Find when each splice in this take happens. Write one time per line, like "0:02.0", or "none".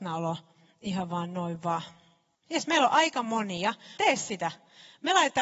0:02.3
0:04.0